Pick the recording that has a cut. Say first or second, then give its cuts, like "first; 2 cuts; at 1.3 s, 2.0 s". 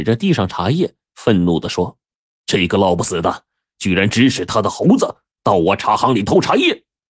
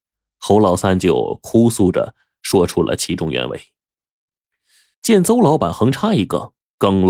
second; 1 cut; at 4.9 s